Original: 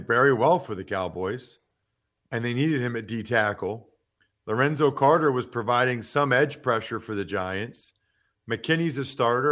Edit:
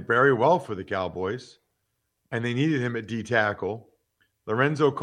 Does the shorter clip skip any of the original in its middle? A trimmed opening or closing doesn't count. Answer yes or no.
no